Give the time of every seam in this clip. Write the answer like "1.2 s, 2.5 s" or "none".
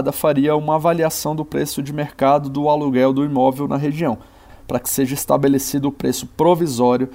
4.5 s